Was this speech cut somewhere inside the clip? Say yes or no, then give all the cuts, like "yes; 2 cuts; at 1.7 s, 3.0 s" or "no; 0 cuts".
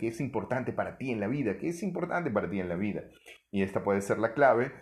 no; 0 cuts